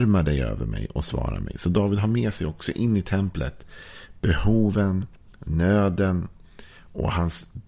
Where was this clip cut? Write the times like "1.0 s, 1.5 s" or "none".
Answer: none